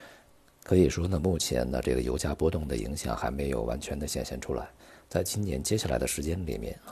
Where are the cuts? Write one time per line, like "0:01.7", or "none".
none